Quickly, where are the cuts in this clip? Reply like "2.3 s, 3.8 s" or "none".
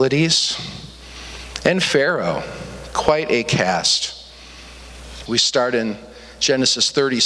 5.3 s